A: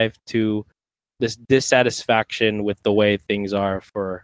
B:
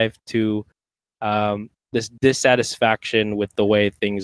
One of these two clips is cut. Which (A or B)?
A